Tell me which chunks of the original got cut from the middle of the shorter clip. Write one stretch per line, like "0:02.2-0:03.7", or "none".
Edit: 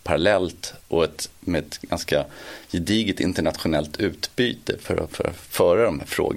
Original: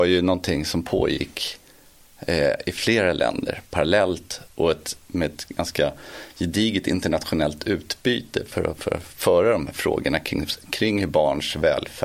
none